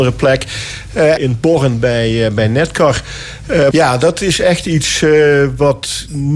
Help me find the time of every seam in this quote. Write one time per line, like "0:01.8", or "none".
0:01.2
0:03.7